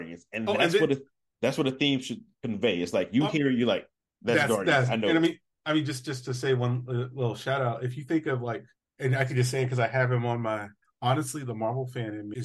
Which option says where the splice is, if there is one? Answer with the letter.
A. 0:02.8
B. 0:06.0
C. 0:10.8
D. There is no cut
C